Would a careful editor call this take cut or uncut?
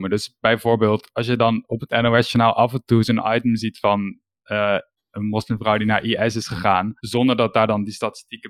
cut